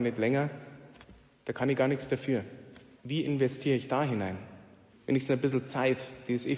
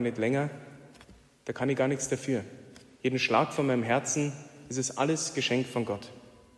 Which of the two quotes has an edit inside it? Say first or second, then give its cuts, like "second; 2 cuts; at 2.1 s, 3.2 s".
first; 2 cuts; at 3.0 s, 4.9 s